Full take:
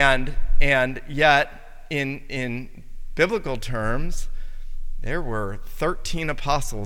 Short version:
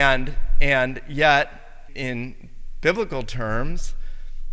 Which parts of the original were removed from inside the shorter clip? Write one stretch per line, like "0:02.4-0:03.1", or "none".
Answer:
0:01.9-0:02.2